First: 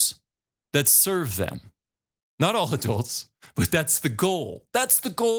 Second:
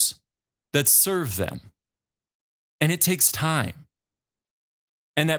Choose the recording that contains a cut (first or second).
first